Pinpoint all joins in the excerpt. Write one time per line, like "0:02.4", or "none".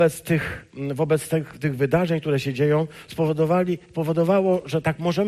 none